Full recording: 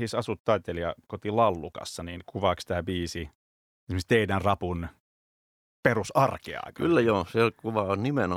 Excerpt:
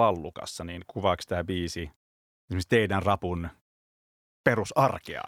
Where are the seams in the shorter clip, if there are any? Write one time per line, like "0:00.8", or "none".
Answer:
none